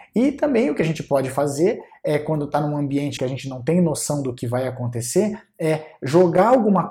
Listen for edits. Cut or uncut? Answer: cut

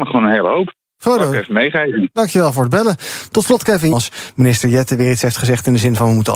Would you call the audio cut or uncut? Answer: cut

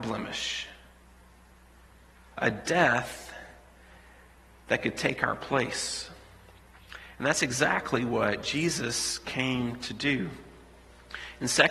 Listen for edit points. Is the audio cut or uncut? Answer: uncut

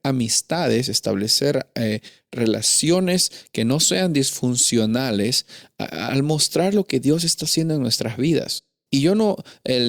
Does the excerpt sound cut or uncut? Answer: cut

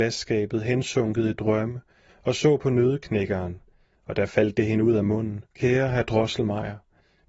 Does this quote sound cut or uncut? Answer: cut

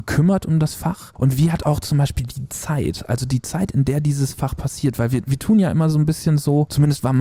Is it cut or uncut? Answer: uncut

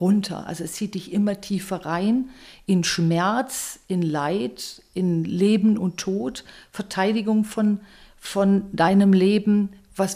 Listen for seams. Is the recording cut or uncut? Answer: uncut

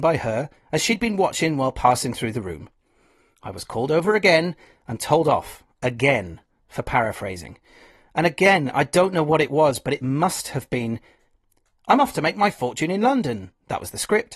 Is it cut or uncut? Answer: uncut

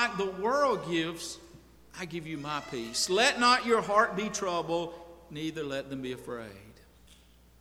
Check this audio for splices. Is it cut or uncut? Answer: uncut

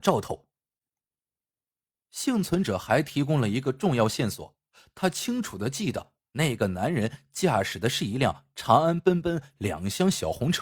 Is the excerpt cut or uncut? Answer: uncut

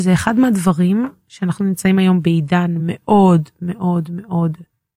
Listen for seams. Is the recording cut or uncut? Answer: uncut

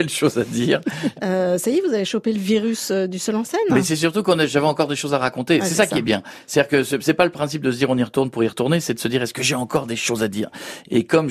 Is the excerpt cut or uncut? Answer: cut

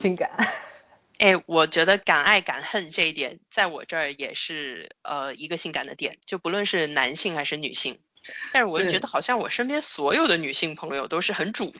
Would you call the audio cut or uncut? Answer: uncut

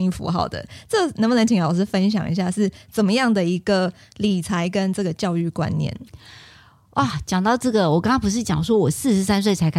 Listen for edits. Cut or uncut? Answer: uncut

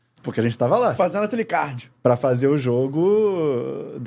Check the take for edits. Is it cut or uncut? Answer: uncut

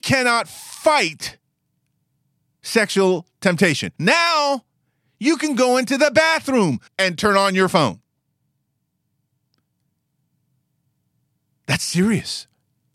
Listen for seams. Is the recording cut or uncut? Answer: cut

